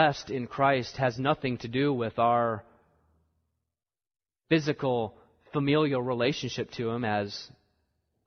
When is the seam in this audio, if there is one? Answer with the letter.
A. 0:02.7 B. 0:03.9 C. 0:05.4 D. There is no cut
D